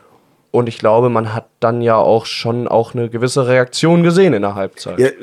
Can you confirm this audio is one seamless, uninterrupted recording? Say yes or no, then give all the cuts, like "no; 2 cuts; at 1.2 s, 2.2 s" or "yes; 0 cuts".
yes; 0 cuts